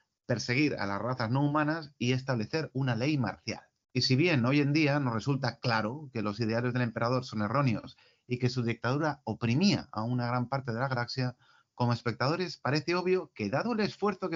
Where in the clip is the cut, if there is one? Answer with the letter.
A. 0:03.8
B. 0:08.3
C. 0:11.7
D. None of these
A